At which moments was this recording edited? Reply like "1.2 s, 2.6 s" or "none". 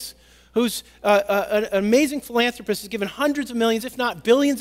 none